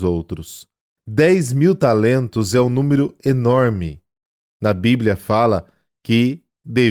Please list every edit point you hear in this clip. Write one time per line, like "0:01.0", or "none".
0:01.0